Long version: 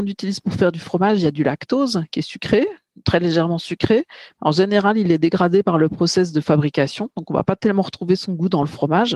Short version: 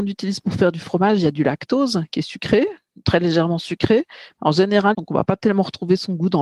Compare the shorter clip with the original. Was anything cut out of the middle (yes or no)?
yes